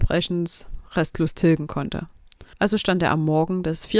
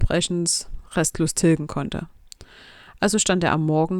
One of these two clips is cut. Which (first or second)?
first